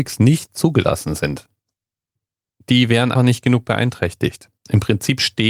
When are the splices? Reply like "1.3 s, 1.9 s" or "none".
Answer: 3.1 s